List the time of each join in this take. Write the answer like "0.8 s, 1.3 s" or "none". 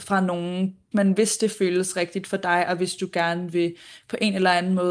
0.9 s